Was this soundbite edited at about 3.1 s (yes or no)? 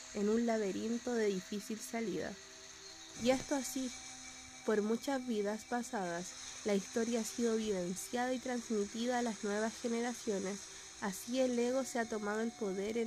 yes